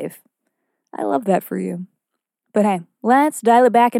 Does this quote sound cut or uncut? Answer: uncut